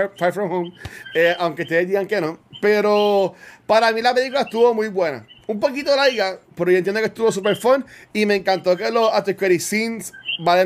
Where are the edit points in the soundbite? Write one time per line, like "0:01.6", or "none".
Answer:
none